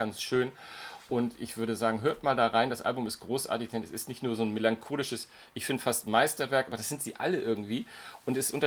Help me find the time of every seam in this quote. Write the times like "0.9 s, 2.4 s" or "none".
none